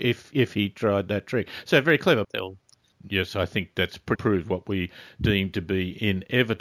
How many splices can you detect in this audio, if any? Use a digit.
2